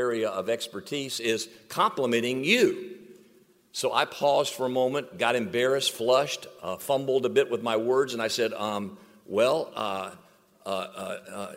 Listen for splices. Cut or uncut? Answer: uncut